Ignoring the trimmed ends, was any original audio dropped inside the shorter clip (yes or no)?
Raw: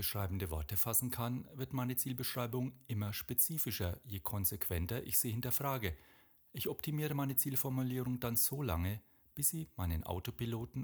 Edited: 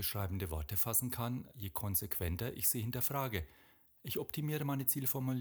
yes